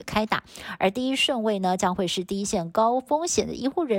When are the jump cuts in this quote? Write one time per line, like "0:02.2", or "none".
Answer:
none